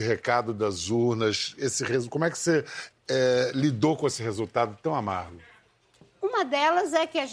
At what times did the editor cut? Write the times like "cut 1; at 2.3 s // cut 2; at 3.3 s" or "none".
cut 1; at 6.0 s